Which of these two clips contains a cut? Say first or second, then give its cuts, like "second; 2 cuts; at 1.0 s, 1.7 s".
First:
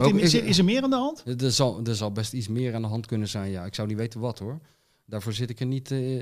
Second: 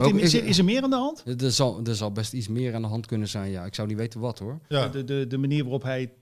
second; 1 cut; at 4.7 s